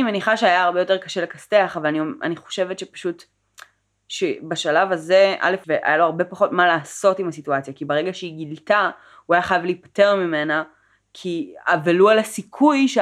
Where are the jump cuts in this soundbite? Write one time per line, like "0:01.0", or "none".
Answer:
0:05.6